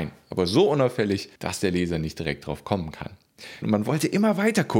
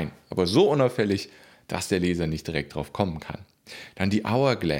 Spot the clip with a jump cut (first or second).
first